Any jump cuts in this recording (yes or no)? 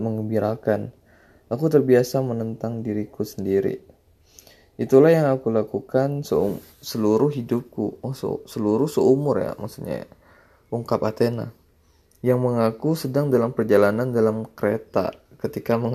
no